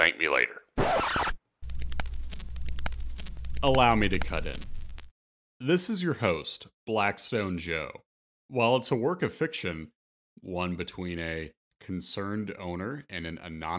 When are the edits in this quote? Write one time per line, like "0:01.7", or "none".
0:08.4
0:10.3